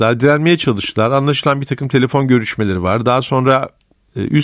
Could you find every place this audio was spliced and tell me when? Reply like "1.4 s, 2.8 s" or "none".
none